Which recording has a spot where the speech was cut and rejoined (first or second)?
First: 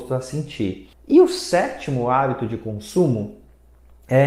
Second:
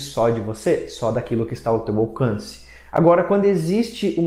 first